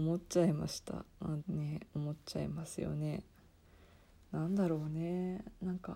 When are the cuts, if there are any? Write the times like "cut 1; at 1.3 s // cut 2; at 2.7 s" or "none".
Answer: cut 1; at 1.4 s